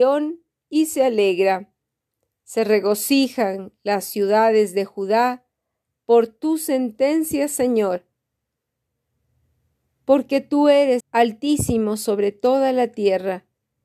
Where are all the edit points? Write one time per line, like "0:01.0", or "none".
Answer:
0:11.0